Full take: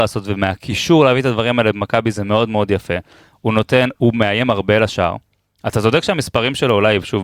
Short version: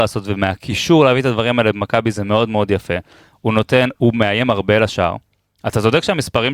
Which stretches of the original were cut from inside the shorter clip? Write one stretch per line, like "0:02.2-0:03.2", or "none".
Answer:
none